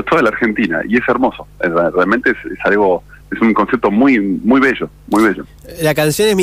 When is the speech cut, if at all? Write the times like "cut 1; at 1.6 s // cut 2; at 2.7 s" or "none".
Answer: none